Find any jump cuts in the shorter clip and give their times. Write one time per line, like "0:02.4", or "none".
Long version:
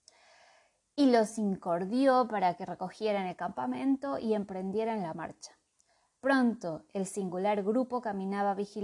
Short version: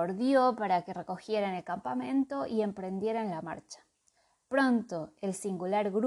none

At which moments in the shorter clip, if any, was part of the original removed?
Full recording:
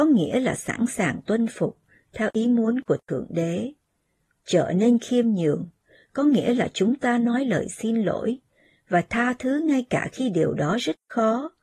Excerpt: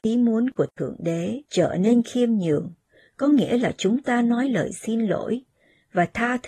0:01.5

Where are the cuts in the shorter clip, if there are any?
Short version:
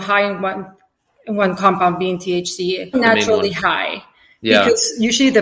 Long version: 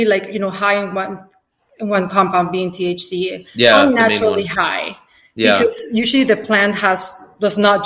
0:02.9

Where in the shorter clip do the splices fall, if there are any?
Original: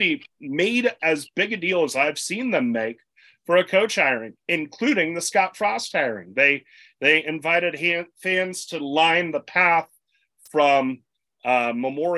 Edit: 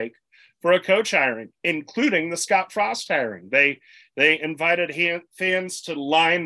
none

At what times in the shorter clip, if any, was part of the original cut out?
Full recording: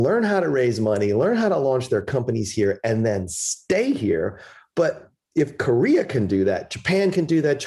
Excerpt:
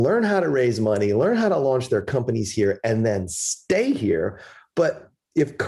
none

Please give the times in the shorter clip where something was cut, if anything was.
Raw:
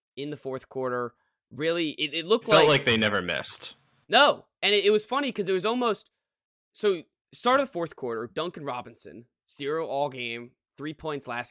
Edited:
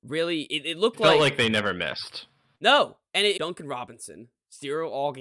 0:03.4

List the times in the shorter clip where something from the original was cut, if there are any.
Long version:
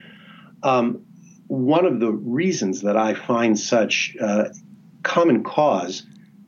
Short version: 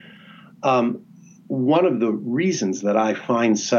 none

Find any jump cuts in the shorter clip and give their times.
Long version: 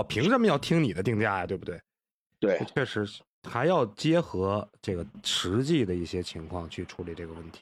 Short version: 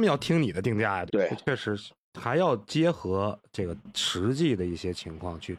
0:01.1

